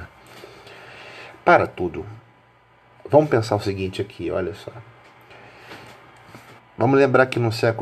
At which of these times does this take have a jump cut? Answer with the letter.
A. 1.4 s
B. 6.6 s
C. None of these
B